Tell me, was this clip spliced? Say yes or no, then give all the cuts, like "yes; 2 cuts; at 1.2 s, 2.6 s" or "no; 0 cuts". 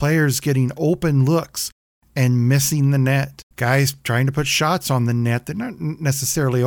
yes; 1 cut; at 3.5 s